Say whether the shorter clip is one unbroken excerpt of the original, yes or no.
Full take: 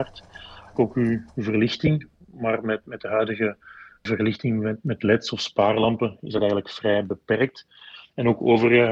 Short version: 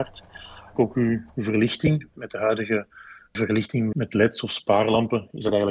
no